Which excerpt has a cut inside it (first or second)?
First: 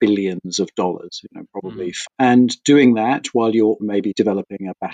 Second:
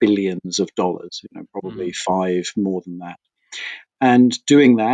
first